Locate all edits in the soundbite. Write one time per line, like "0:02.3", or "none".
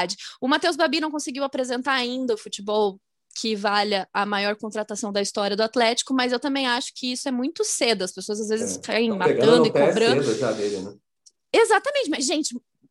none

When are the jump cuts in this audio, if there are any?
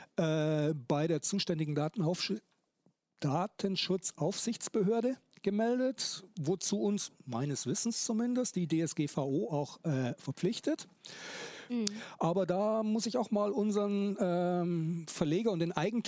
0:11.7

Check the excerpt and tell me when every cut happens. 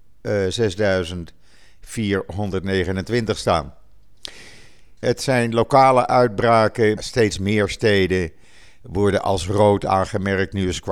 0:05.0
0:07.0

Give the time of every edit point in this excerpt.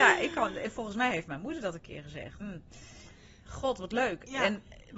0:02.4

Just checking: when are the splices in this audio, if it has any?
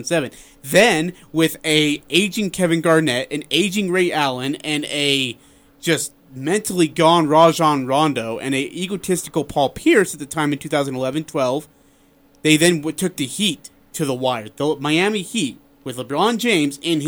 none

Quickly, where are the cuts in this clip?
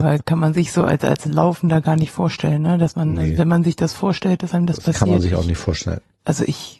none

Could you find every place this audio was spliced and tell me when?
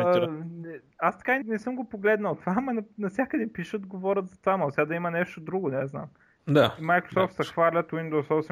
0:01.4
0:06.4

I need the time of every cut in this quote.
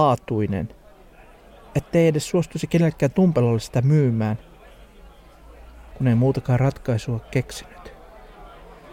0:05.9

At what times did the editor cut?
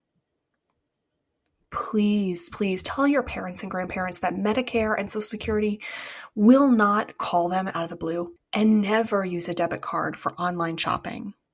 0:02.5
0:08.4

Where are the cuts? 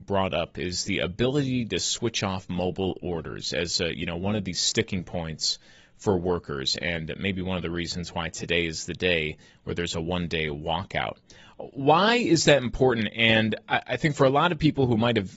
none

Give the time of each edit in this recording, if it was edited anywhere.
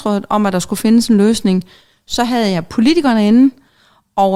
none

